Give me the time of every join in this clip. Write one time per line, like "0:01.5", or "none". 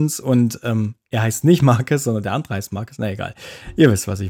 none